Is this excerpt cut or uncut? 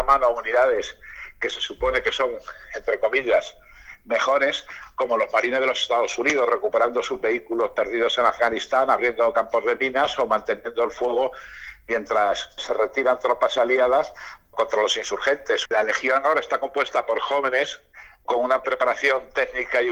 cut